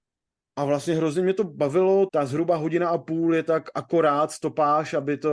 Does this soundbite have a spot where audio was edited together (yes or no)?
yes